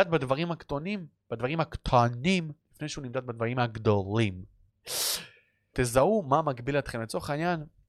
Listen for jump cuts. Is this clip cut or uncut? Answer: cut